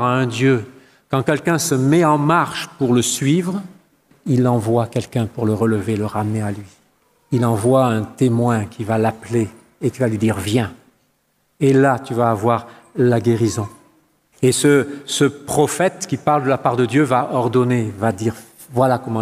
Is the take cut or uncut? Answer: cut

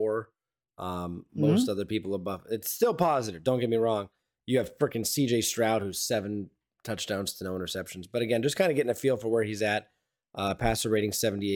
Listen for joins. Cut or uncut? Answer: uncut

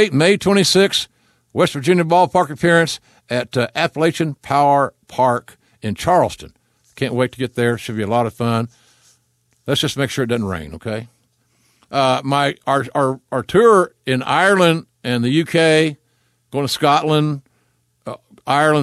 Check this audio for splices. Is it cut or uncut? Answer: uncut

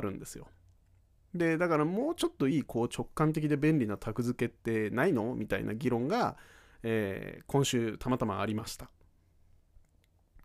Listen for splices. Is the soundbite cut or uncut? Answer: cut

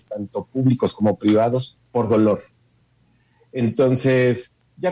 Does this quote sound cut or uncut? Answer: uncut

